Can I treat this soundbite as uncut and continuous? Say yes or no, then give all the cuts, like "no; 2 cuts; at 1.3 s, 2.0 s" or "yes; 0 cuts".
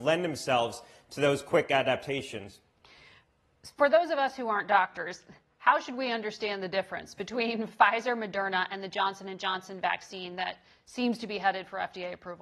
yes; 0 cuts